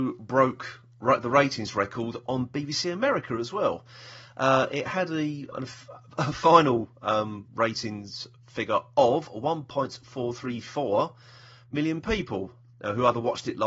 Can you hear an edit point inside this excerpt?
yes; 1 cut; at 5.5 s

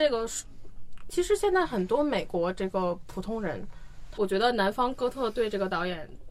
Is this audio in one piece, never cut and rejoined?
no; 2 cuts; at 1.1 s, 4.2 s

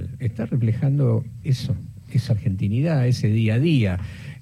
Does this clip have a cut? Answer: yes; 1 cut; at 1.4 s

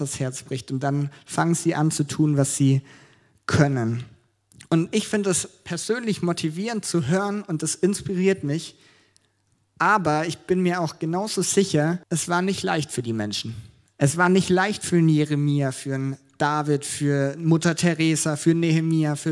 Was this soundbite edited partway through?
yes; 1 cut; at 12.0 s

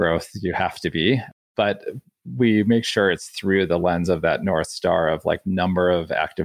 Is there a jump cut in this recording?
no; 0 cuts

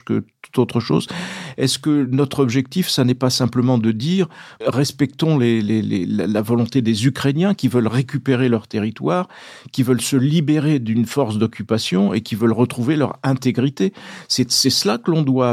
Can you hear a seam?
no; 0 cuts

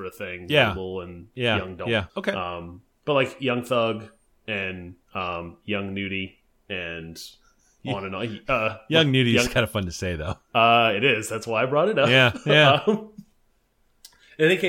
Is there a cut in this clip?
yes; 2 cuts; at 2.1 s, 5.0 s

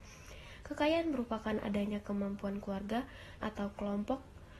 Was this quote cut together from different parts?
yes; 1 cut; at 3.4 s

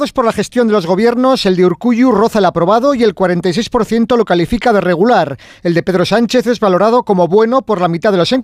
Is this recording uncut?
yes; 0 cuts

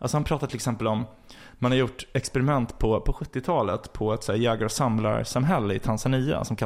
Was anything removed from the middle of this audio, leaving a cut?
no; 0 cuts

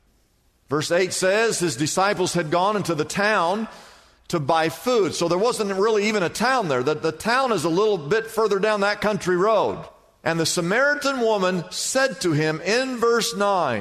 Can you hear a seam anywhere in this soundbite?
no; 0 cuts

